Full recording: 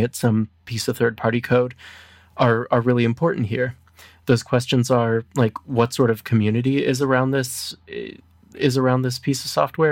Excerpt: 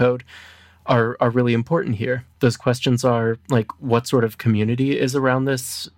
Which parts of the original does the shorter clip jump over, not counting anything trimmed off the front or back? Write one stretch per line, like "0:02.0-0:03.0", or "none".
0:03.8-0:04.2